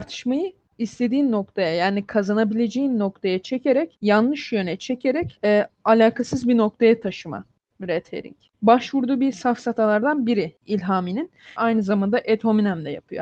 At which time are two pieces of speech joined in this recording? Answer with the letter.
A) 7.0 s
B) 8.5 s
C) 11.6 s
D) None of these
C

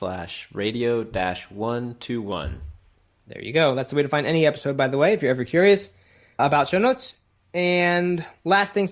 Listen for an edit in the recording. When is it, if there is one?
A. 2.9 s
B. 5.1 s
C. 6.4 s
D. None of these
C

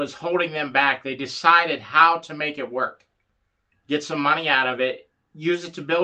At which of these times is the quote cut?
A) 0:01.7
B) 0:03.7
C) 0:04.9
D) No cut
B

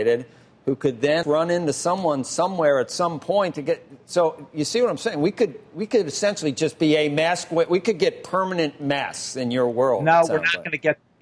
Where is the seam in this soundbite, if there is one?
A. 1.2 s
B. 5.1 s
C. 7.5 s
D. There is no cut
A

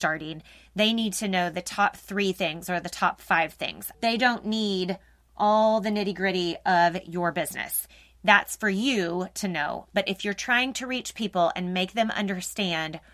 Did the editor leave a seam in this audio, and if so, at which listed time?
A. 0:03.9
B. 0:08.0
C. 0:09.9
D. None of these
A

